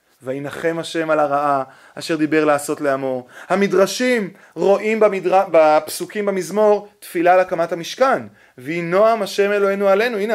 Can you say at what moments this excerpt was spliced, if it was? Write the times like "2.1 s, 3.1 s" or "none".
none